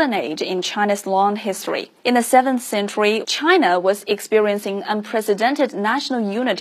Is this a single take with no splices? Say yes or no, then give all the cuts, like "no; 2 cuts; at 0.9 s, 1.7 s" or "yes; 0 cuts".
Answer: no; 2 cuts; at 2.0 s, 3.2 s